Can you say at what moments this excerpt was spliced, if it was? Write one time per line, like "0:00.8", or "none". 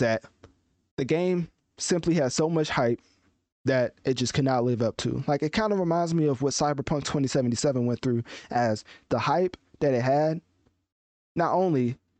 none